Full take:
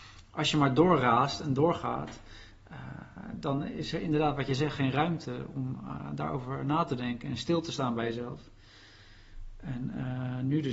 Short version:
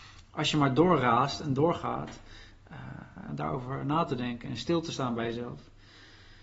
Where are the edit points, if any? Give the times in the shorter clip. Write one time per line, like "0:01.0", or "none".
0:03.3